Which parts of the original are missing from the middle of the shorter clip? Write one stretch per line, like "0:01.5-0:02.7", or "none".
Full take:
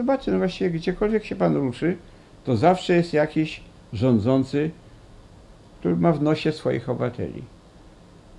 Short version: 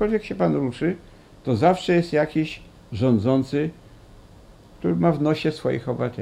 none